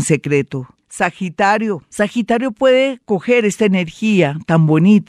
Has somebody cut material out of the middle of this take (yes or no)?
no